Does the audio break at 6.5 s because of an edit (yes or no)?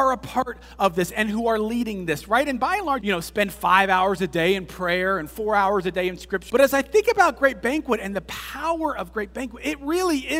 yes